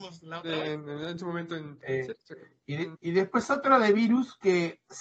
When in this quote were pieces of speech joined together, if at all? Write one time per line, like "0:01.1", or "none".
none

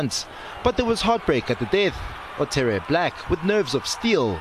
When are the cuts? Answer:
none

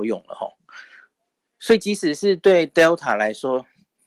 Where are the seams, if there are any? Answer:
none

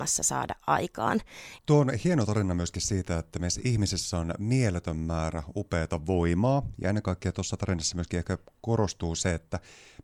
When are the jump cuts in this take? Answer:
0:01.6

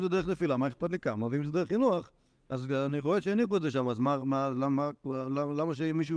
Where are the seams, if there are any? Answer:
none

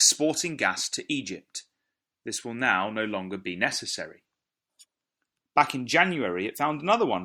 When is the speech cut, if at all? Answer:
0:05.4

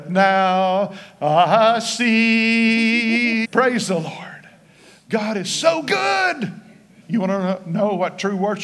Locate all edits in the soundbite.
0:03.4
0:07.0

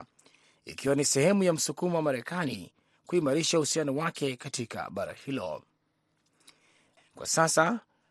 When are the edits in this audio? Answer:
0:07.0

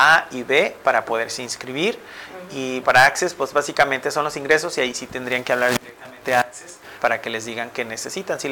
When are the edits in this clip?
0:02.8
0:07.0

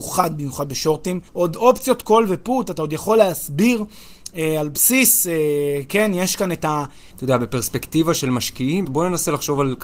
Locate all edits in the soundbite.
0:01.3
0:07.1
0:08.8

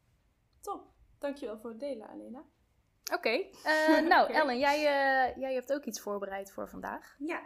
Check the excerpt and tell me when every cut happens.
none

